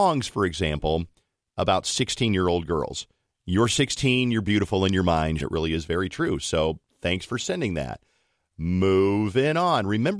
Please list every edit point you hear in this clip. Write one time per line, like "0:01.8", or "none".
0:05.4

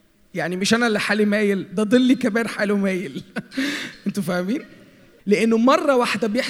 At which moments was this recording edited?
0:05.2

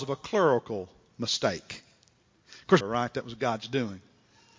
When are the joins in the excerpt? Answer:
0:02.8

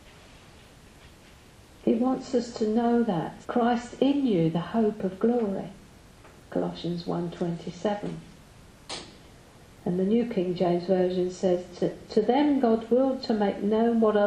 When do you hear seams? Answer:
0:03.4

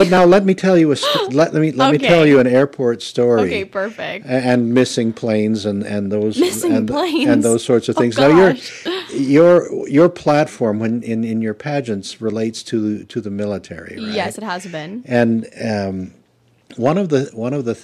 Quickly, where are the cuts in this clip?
none

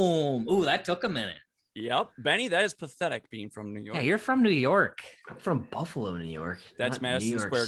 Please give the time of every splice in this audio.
none

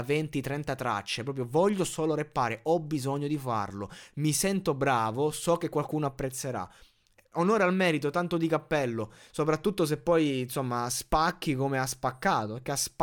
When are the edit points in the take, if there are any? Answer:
none

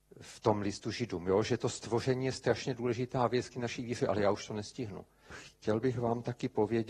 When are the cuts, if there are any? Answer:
0:05.3

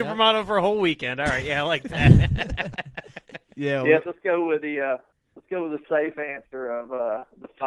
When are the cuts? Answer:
0:04.0

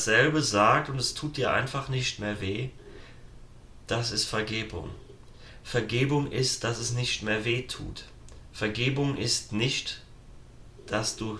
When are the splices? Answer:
none

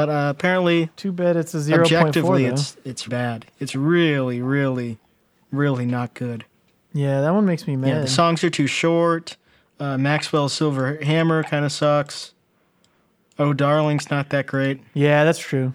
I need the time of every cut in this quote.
0:03.1

